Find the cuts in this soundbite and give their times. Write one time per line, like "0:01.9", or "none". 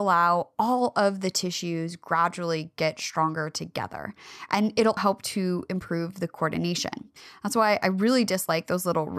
0:05.0

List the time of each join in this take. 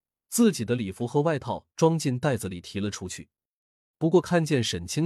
0:03.9

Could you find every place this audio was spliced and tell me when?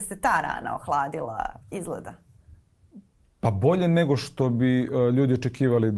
0:01.6

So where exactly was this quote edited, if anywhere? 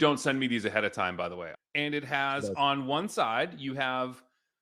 0:01.5

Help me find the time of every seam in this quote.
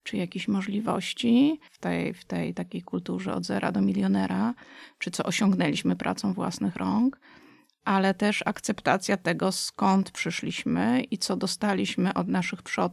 0:01.7

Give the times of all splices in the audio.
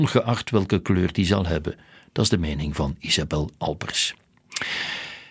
none

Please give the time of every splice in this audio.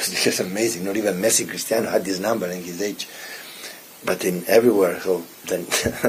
none

